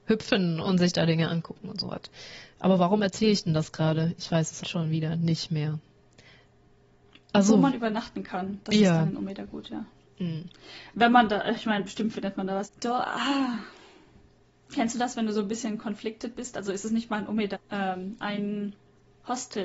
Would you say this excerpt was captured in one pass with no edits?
no; 3 cuts; at 4.6 s, 12.6 s, 17.5 s

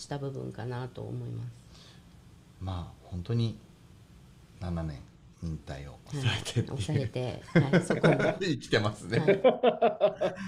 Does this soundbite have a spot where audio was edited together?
no; 0 cuts

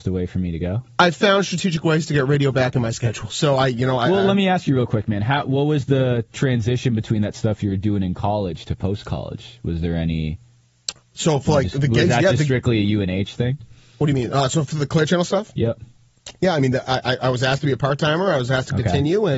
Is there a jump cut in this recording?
no; 0 cuts

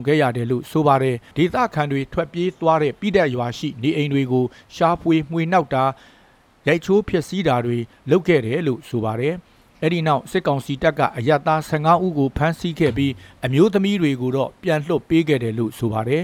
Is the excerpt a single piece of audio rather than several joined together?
yes; 0 cuts

